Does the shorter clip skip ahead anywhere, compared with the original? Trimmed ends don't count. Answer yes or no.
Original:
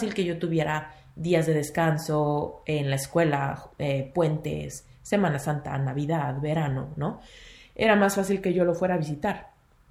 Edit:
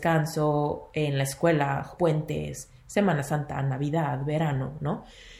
yes